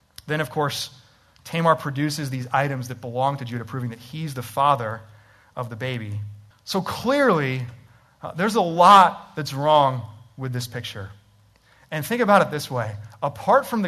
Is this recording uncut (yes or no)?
no